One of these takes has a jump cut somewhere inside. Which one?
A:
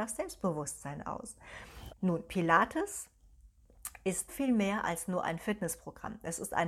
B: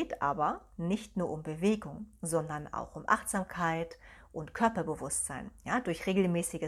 A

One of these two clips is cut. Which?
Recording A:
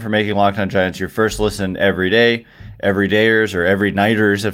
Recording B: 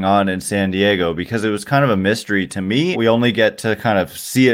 B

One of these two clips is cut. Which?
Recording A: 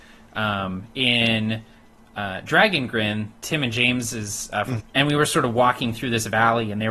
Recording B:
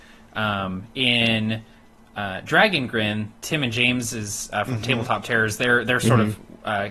A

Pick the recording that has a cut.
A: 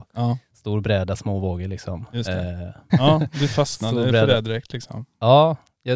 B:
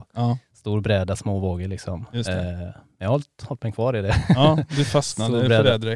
A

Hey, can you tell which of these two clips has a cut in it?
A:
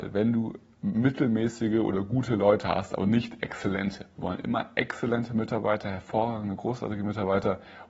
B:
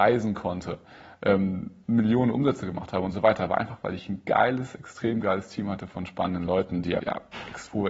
B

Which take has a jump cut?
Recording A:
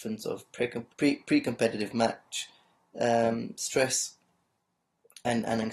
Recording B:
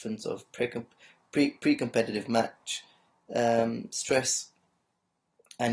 A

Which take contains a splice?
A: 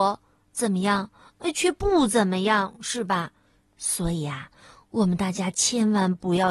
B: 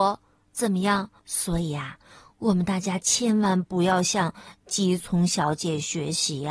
B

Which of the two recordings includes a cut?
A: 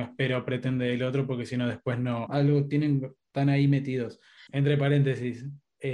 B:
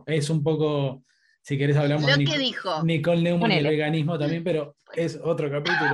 A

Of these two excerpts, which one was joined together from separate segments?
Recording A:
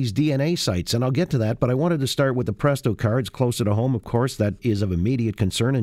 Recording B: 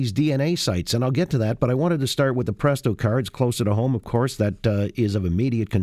A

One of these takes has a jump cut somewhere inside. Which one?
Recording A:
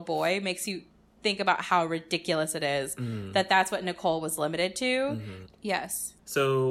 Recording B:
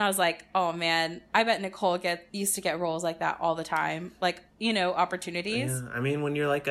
A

